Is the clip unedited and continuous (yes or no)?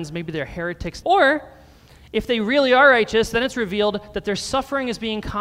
no